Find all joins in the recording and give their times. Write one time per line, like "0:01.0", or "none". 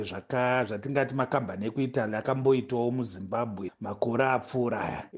0:03.7